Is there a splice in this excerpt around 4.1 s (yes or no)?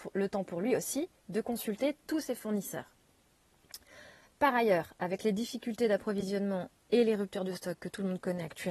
no